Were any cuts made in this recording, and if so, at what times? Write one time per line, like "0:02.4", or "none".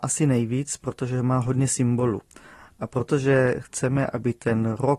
none